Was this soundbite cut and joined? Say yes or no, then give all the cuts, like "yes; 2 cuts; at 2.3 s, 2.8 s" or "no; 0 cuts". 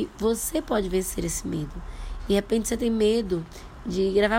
yes; 1 cut; at 2.2 s